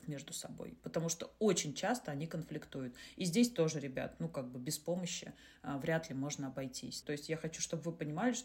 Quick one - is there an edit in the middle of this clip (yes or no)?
yes